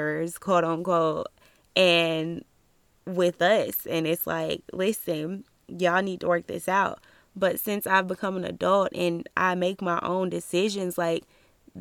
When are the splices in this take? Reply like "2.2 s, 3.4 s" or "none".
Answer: none